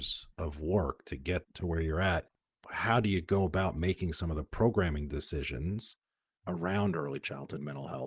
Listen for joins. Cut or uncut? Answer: uncut